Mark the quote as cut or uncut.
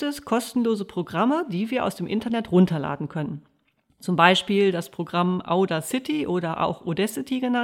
uncut